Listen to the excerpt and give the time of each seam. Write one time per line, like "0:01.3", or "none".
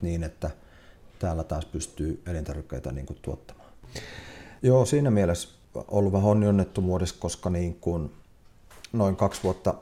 0:04.6